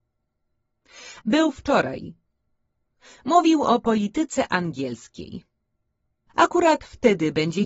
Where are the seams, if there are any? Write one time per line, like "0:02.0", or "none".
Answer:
0:01.2
0:06.3